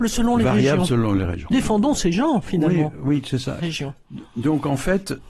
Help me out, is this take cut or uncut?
cut